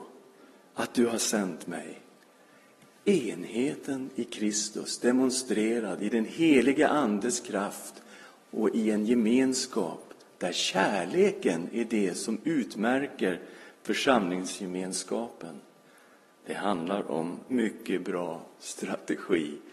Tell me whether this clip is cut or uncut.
cut